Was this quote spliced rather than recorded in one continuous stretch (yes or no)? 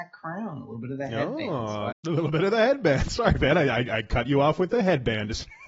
yes